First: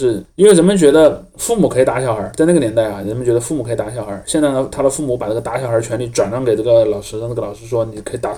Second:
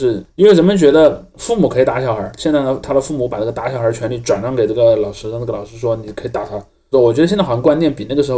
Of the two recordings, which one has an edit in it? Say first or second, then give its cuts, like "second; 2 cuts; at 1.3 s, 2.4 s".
second; 2 cuts; at 2.4 s, 6.9 s